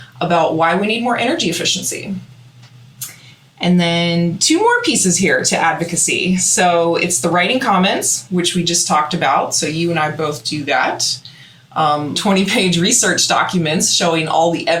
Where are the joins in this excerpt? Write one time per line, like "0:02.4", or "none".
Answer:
0:12.1